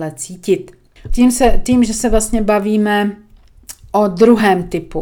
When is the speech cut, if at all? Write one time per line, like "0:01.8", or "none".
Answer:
0:01.1